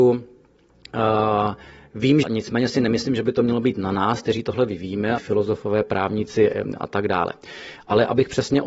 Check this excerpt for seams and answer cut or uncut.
cut